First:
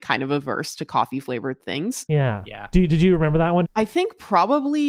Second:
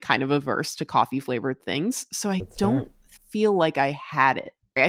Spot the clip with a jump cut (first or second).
first